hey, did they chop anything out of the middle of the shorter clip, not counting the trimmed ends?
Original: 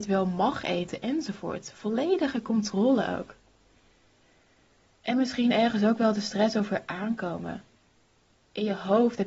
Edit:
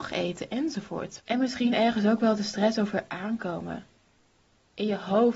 yes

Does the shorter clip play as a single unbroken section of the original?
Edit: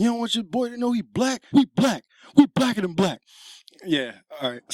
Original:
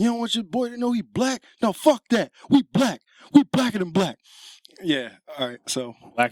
no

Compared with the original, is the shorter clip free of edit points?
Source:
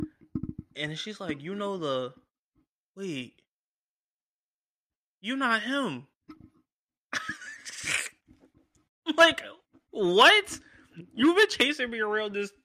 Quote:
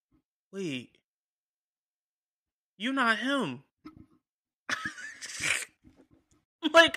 yes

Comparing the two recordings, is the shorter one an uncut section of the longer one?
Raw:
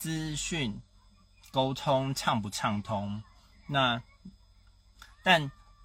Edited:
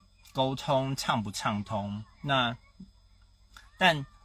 no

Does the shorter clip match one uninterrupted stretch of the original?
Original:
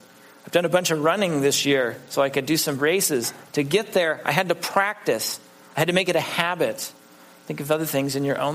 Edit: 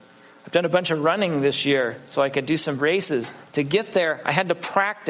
yes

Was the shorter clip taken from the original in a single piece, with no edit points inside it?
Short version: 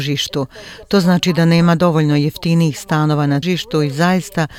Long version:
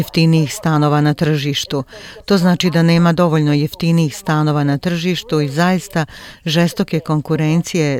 no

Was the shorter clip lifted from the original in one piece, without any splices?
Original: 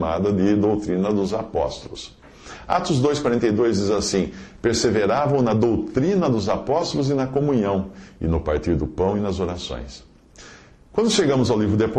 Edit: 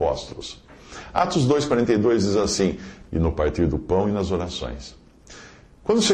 no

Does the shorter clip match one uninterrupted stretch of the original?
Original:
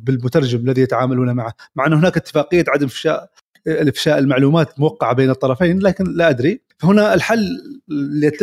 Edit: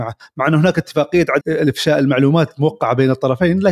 no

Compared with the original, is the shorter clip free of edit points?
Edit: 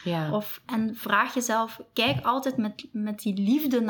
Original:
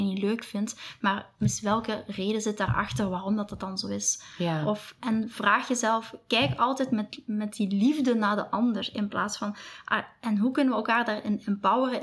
yes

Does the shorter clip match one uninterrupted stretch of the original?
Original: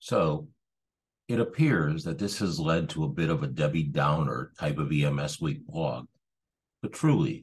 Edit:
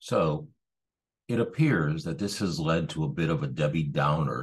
yes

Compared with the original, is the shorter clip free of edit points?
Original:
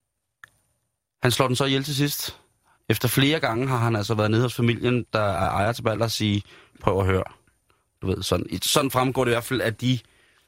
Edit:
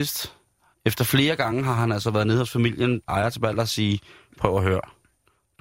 no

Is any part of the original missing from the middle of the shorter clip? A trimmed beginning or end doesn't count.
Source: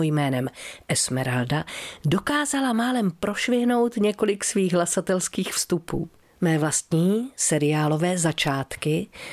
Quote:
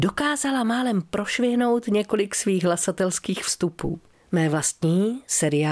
no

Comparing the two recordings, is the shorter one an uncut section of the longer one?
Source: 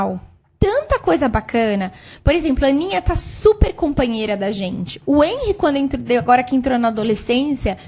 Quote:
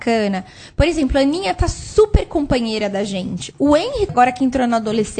no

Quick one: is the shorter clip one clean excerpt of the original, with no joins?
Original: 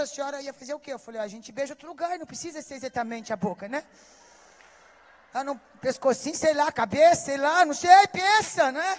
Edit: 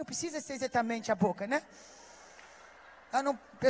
yes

